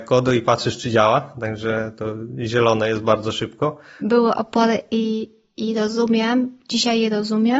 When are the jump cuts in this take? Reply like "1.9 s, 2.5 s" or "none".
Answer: 4.0 s